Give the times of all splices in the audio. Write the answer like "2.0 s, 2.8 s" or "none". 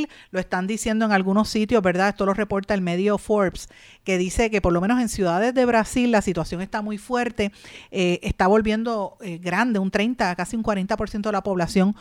none